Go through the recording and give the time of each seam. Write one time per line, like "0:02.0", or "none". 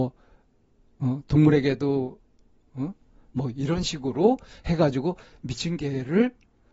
0:03.3